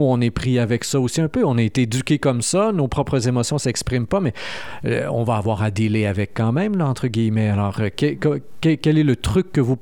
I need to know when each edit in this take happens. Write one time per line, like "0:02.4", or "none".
none